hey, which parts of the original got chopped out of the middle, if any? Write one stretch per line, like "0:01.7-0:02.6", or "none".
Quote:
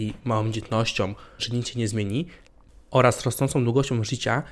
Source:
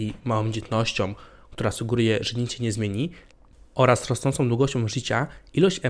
0:01.4-0:02.2